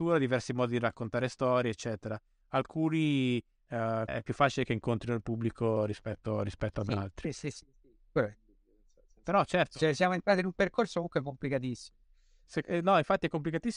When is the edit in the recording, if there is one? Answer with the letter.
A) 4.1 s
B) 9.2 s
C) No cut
A